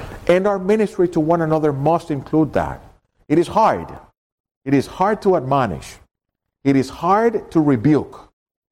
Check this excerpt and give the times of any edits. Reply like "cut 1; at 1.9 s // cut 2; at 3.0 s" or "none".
none